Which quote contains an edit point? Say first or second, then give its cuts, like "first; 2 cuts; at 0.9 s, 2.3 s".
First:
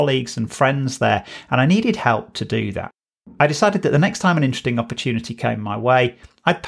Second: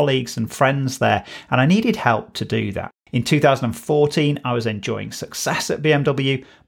second; 1 cut; at 3.1 s